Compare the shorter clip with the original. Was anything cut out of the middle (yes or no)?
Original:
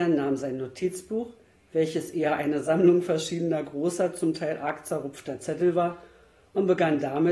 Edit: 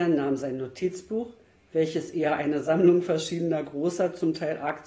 no